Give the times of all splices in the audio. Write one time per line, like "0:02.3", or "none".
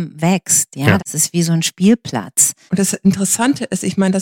0:01.0
0:02.7